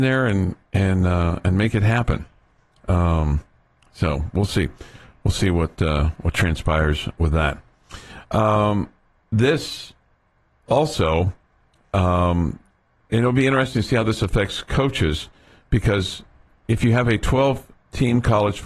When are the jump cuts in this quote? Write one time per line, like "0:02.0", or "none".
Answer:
none

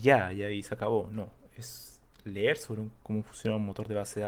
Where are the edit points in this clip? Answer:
none

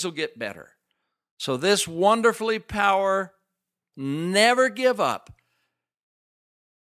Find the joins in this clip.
0:03.9

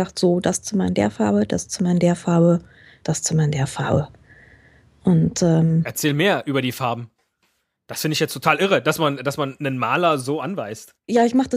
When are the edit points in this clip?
none

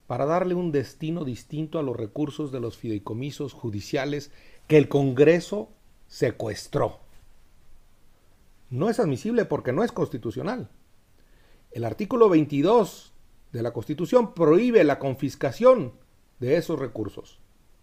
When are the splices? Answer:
none

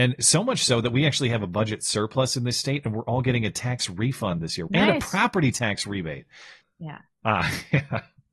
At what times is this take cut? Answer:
0:04.7
0:06.6

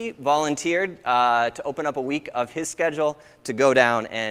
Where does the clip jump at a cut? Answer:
none

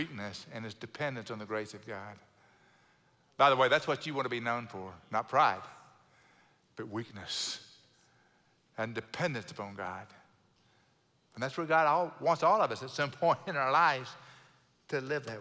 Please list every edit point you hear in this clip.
0:11.2

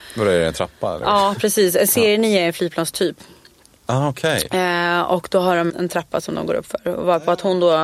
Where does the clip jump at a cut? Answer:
0:05.7

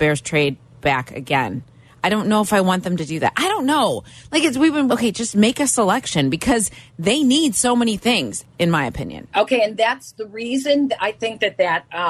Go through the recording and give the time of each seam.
0:04.9
0:08.4

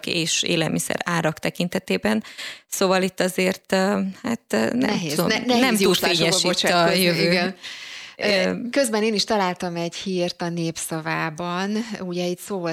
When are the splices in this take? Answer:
none

